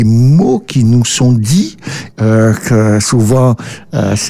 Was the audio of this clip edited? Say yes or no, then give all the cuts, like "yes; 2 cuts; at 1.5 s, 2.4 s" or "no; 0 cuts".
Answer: yes; 1 cut; at 2.1 s